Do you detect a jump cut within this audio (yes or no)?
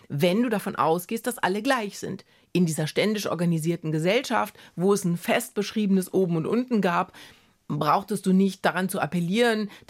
no